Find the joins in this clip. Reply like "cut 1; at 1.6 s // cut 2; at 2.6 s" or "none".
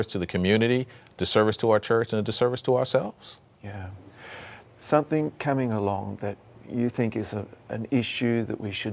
cut 1; at 4.6 s